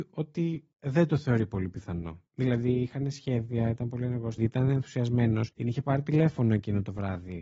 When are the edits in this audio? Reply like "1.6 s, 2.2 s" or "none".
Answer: 4.4 s, 5.5 s